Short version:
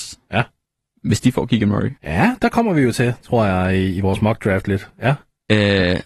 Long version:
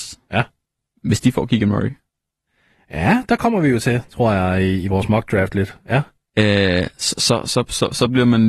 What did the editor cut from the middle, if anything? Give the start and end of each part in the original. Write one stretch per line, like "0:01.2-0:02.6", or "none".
0:02.0-0:02.8